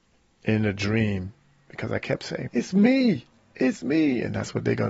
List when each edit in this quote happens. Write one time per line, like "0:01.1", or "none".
0:02.5